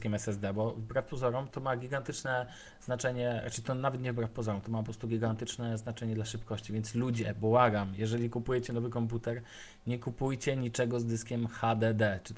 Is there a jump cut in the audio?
no; 0 cuts

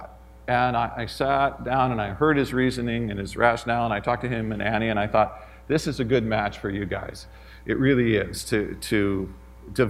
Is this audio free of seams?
yes; 0 cuts

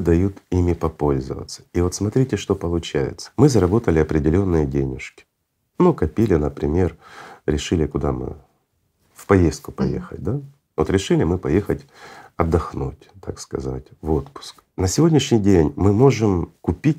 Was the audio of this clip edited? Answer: no; 0 cuts

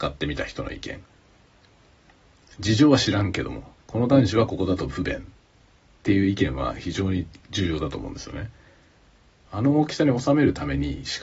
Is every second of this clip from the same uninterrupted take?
no; 2 cuts; at 3.8 s, 9.5 s

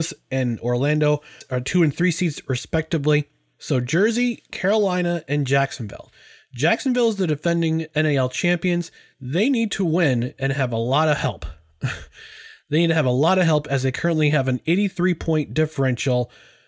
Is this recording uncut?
yes; 0 cuts

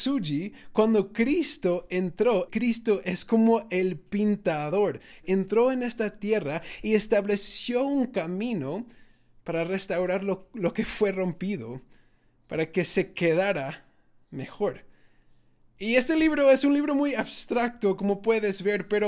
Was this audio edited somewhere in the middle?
yes; 2 cuts; at 2.5 s, 5.2 s

